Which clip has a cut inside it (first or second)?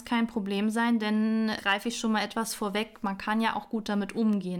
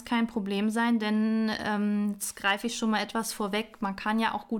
first